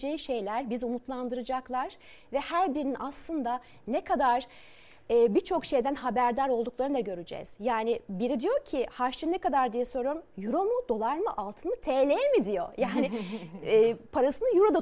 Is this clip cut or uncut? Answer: uncut